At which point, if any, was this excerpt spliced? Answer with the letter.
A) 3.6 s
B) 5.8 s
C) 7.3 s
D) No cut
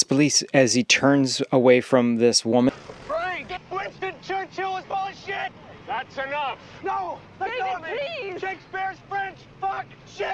A